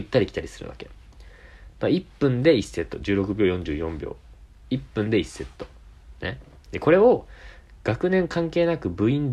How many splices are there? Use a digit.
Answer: 0